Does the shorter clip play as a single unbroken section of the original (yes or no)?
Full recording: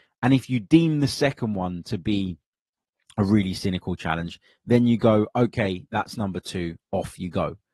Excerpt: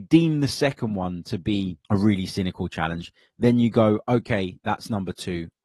no